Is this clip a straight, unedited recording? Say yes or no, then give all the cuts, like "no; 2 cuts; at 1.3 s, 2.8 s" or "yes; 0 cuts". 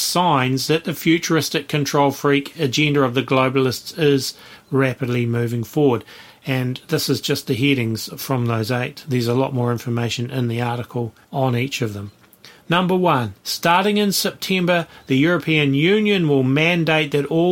no; 1 cut; at 11.2 s